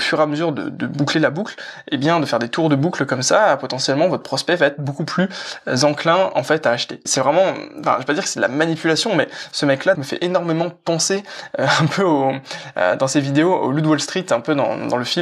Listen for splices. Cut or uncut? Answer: cut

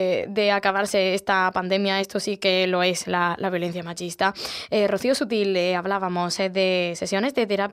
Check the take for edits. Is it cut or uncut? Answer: uncut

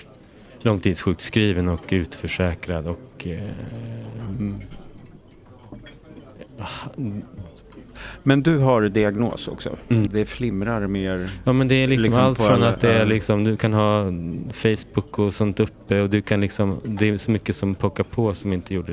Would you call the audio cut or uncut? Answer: cut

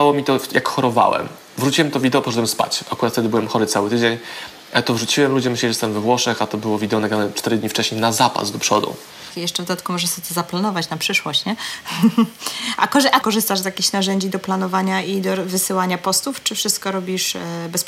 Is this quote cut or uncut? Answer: cut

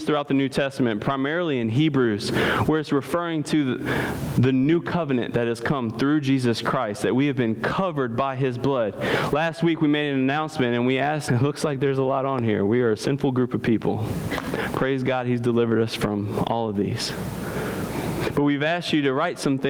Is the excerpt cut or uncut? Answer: cut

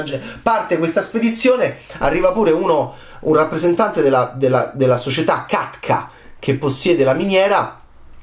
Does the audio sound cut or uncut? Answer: uncut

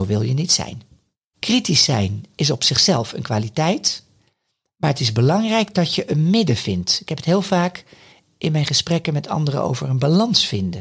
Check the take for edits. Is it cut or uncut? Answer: cut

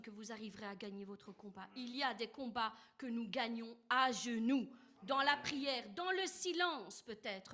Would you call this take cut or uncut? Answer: uncut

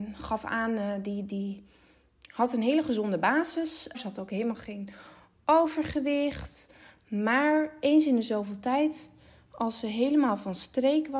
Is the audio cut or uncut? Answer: cut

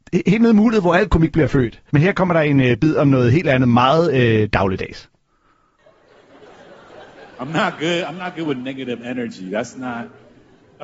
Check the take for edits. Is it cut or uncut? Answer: cut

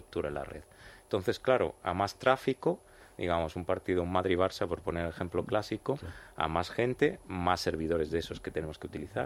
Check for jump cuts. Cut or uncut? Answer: cut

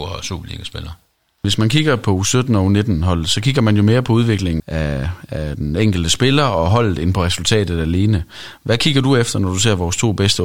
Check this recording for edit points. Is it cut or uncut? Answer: cut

